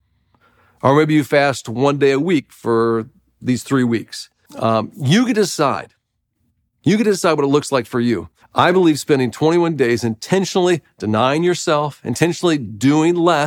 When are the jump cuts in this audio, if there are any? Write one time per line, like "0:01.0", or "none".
0:04.4
0:08.4